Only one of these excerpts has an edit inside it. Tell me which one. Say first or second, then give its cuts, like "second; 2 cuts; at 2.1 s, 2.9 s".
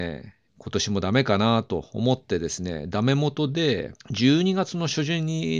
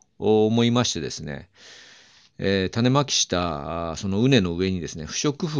first; 1 cut; at 4.0 s